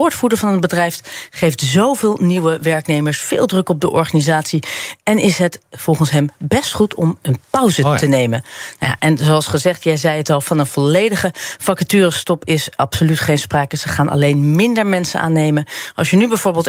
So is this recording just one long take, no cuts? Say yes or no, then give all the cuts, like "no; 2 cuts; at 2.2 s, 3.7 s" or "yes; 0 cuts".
no; 1 cut; at 7.2 s